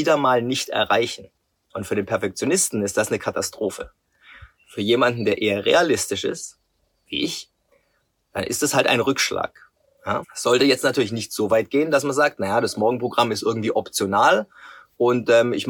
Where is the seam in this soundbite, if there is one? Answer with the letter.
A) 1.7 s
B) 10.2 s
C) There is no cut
B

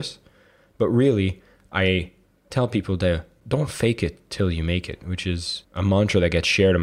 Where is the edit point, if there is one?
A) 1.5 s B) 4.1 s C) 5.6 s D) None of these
C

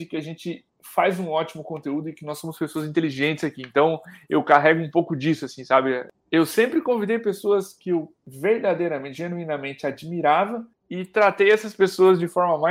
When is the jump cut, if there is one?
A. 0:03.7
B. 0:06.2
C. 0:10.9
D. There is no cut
B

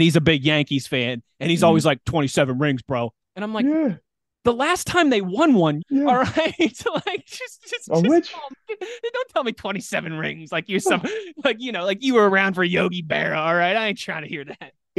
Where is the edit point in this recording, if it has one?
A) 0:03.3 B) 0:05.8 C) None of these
B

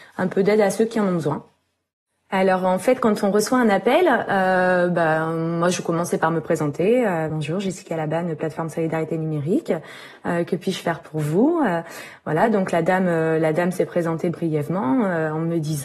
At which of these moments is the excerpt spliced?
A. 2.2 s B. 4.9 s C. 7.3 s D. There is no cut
D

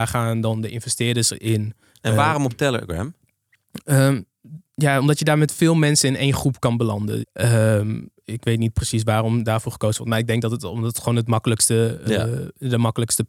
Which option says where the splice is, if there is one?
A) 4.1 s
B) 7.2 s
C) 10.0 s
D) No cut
B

